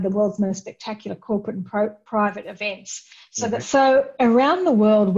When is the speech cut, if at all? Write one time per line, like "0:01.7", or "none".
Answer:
0:03.6